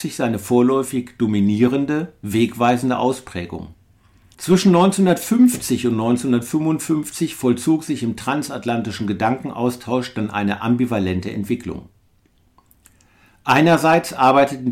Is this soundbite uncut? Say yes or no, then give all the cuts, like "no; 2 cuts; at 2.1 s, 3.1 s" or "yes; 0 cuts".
no; 1 cut; at 4.3 s